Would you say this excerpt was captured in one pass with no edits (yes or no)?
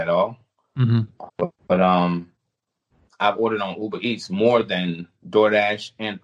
no